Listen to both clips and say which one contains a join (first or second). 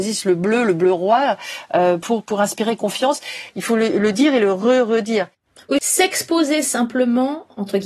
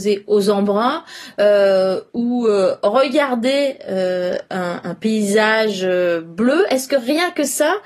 first